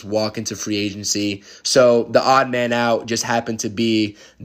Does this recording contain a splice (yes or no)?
no